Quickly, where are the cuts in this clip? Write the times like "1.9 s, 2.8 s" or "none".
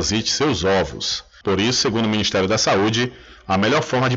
1.4 s